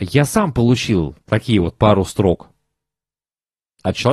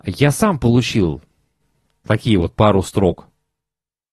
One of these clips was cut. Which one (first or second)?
first